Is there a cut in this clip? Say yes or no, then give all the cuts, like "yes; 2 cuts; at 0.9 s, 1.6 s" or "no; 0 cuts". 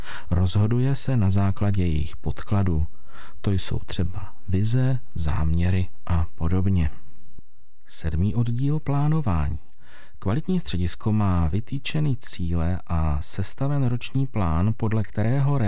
no; 0 cuts